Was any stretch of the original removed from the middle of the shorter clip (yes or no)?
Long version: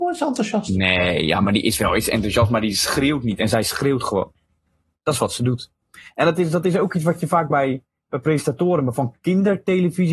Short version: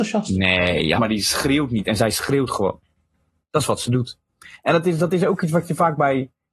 yes